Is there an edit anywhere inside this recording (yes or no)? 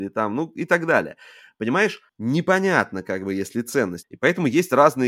yes